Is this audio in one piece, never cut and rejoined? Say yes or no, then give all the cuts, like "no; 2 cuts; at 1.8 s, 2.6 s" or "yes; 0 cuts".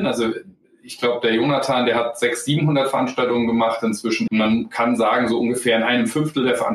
no; 1 cut; at 4.3 s